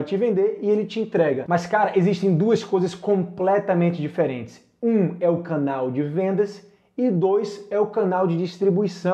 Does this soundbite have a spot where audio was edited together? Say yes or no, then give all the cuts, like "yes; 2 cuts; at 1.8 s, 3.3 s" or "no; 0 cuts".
yes; 1 cut; at 1.5 s